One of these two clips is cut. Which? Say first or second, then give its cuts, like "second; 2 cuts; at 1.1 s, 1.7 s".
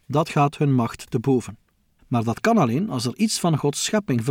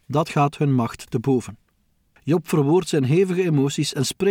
first; 1 cut; at 2.0 s